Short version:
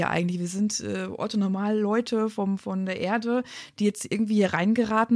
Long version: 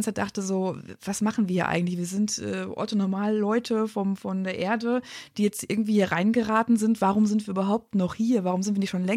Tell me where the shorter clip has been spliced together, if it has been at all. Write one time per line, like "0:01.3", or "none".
none